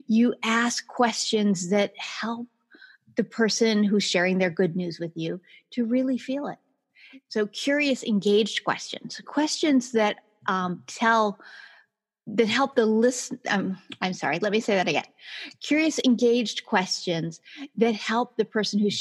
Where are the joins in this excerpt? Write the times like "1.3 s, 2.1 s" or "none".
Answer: none